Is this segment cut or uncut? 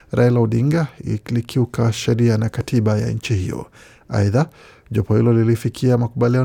uncut